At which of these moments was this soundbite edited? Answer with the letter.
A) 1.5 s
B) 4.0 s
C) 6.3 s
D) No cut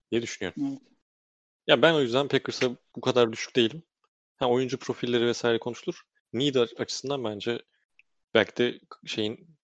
D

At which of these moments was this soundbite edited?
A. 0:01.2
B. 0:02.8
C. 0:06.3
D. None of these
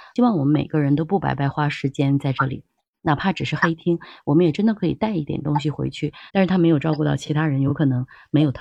C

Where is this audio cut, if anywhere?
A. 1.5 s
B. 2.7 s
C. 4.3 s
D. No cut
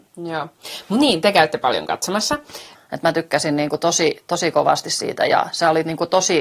B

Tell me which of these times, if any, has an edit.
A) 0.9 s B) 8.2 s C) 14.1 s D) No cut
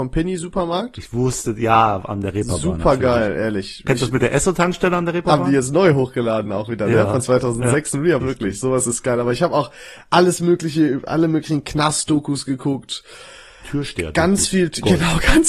B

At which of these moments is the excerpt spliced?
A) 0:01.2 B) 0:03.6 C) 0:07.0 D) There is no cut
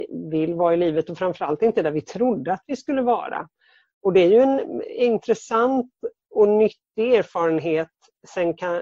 D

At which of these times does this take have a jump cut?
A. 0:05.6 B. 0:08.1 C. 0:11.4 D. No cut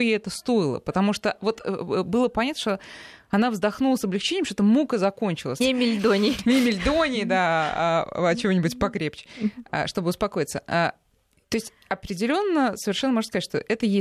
A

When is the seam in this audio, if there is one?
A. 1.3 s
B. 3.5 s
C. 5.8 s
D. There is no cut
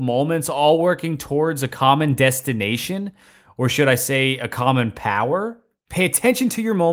C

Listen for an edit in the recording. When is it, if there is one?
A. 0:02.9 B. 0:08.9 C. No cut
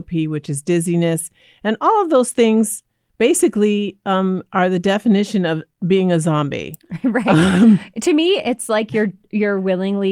C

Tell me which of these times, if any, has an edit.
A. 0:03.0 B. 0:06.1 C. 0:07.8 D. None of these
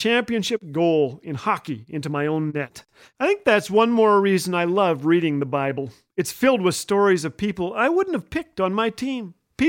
A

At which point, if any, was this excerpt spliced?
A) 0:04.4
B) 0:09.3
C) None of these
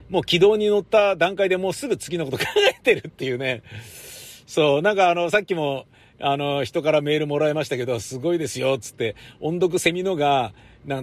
C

